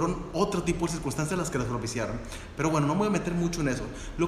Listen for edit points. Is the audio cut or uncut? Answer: uncut